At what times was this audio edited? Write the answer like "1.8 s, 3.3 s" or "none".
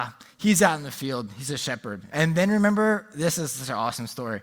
2.1 s